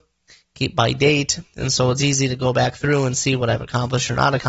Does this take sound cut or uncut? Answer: uncut